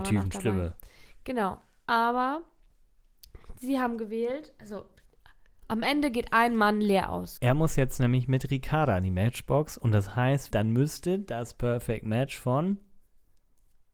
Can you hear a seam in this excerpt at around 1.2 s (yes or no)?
no